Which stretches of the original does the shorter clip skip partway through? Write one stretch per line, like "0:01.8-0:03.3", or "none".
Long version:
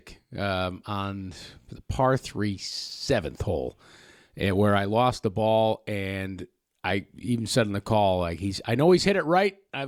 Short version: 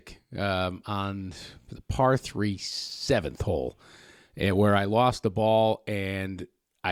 none